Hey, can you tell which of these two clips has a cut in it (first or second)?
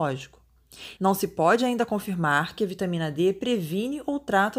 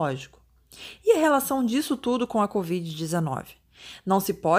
first